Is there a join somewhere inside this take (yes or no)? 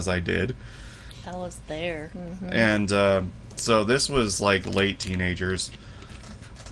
yes